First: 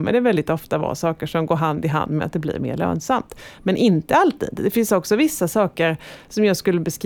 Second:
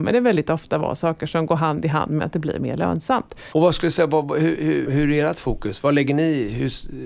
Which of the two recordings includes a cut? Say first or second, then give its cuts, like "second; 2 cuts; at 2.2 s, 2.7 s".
second; 2 cuts; at 3.5 s, 4.9 s